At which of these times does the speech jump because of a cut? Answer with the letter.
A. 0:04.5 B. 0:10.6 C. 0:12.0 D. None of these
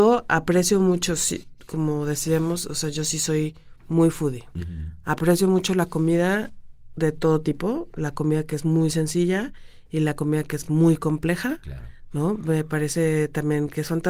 D